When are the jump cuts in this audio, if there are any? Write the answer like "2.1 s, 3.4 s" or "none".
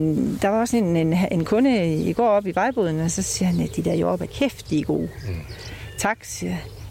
4.3 s